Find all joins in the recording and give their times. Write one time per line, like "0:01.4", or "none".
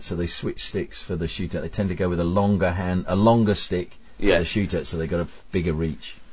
none